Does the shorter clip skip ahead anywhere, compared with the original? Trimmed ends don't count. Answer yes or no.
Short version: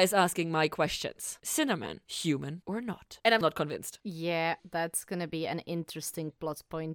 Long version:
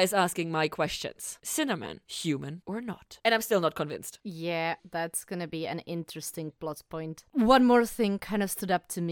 yes